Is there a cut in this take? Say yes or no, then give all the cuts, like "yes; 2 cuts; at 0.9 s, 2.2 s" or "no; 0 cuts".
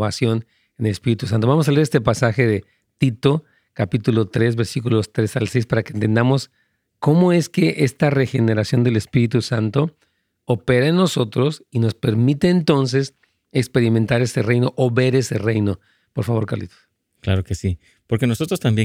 no; 0 cuts